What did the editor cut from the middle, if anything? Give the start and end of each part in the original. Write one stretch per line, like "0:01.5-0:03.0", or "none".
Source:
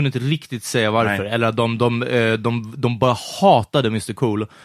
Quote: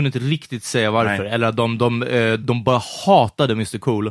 0:02.4-0:02.8